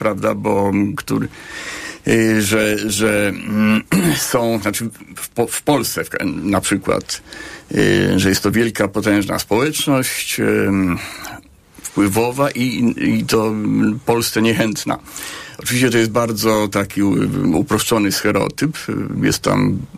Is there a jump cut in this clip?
no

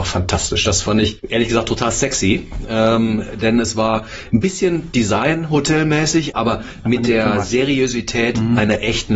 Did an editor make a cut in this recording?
no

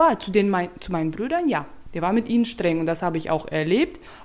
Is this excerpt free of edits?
yes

